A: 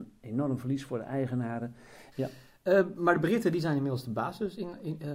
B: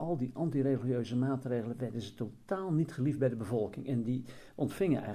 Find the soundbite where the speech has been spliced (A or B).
A